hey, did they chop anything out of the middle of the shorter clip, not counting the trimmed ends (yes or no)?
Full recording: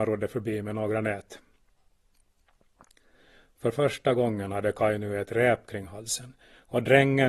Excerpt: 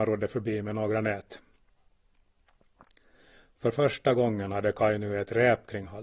no